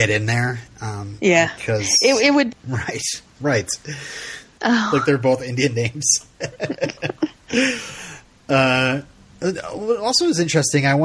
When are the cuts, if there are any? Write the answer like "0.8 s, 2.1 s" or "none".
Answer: 2.5 s, 4.6 s